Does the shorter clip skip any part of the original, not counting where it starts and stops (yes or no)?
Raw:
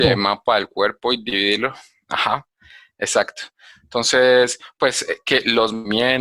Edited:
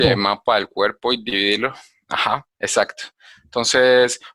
yes